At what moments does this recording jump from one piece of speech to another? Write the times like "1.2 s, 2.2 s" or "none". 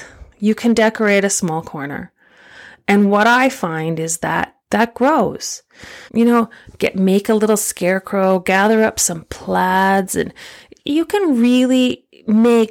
4.6 s, 6.1 s